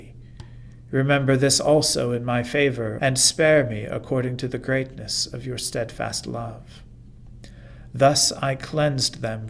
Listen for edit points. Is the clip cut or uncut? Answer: cut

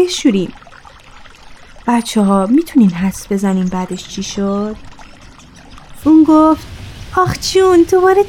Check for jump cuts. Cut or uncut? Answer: cut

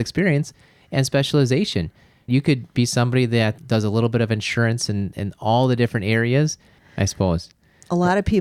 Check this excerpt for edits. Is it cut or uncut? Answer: cut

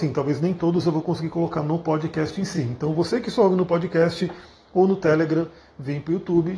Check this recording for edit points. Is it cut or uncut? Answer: uncut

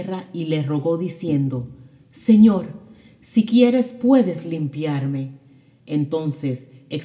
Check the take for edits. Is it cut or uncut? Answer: uncut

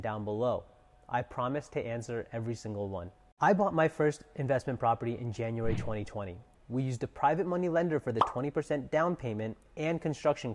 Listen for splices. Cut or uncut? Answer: cut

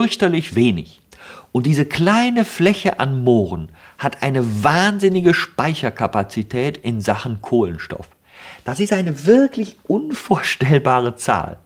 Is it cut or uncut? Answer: uncut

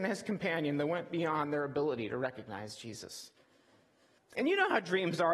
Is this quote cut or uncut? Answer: cut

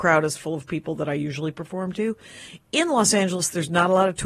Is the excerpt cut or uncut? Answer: uncut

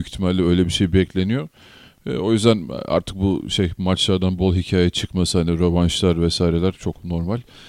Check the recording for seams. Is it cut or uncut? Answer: cut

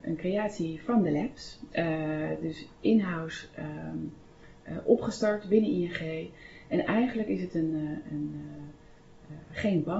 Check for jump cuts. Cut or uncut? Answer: uncut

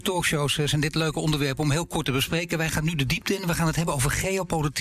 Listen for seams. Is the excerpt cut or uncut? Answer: uncut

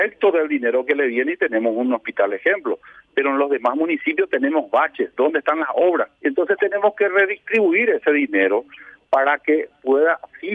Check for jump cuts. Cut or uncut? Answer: cut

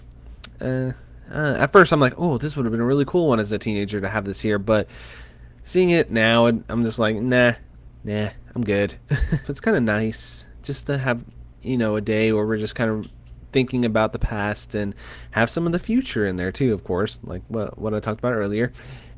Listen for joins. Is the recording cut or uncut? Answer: cut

